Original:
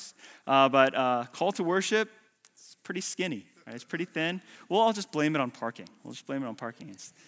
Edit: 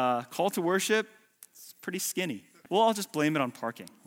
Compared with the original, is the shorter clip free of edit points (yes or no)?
no